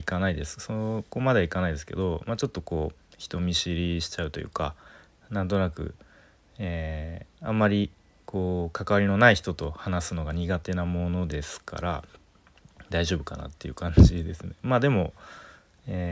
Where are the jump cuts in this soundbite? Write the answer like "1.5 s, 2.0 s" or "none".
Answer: 7.3 s